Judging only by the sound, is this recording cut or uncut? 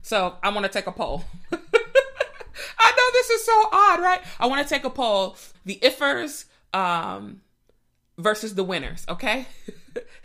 cut